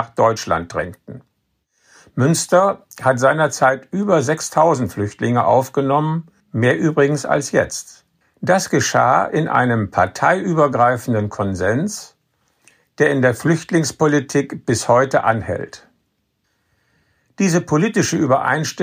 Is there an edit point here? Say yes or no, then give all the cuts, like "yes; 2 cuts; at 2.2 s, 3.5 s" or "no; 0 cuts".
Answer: yes; 2 cuts; at 6.4 s, 8.2 s